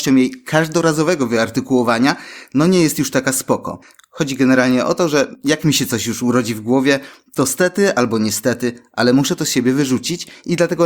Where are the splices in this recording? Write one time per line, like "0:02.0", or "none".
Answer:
none